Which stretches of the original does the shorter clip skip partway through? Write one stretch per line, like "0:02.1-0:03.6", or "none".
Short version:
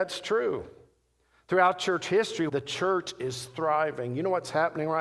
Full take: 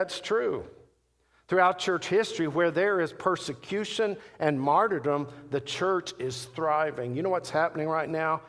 0:02.5-0:05.5